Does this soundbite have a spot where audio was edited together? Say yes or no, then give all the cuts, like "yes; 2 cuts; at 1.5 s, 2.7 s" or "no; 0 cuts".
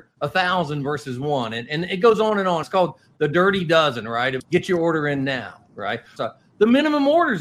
yes; 3 cuts; at 2.6 s, 4.4 s, 6.2 s